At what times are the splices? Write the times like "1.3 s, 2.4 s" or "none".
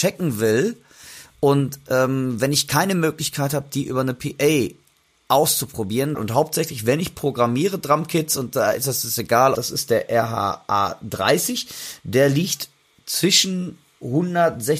6.1 s, 9.5 s